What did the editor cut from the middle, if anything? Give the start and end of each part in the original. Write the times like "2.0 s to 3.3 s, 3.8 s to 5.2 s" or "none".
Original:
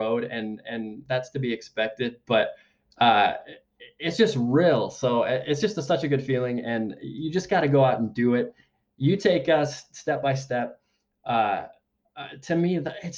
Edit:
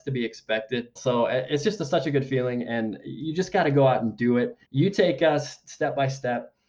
2.2 s to 4.9 s, 8.6 s to 8.9 s